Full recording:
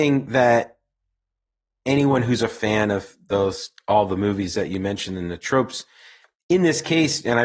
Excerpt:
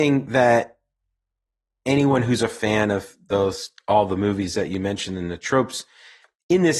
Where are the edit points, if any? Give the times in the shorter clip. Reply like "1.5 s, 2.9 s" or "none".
none